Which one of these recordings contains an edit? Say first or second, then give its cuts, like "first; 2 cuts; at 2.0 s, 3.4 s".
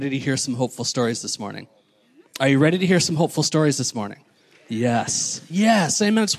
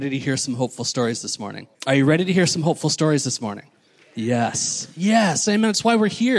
second; 1 cut; at 1.7 s